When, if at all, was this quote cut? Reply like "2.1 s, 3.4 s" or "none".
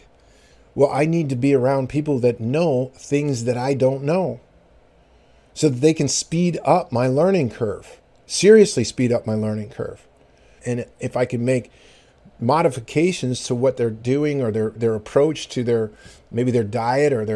10.6 s, 14.8 s